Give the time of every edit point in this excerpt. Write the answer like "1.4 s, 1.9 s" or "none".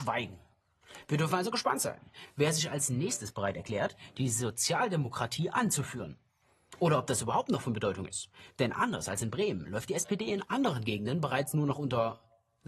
none

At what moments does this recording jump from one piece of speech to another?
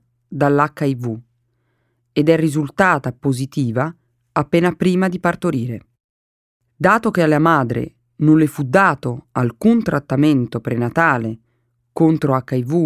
none

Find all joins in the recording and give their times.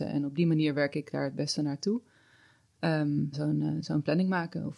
3.3 s

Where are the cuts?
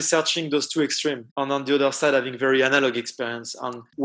1.3 s

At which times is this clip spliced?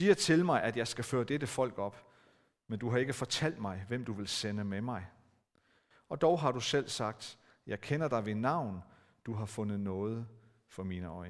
none

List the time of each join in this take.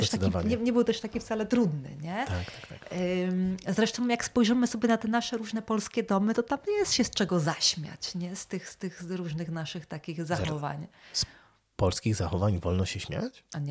none

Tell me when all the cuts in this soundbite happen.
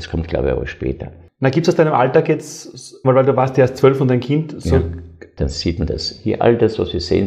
3.0 s, 5.4 s

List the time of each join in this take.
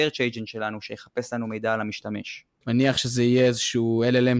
2.7 s

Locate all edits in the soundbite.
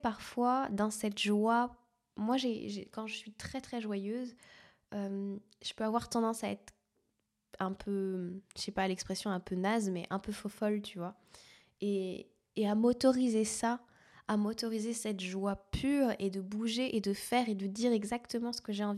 none

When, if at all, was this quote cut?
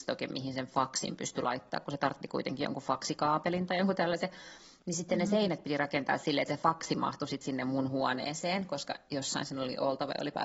none

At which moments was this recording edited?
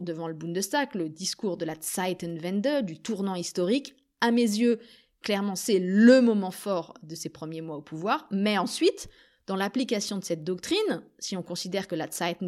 none

